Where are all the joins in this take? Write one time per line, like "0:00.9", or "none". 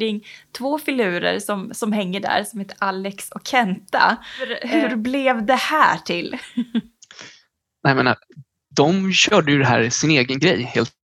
none